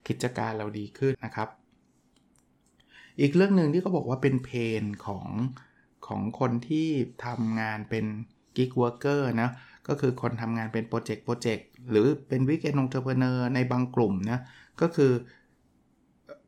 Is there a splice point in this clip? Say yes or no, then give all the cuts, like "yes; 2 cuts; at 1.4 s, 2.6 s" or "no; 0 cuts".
yes; 1 cut; at 1.1 s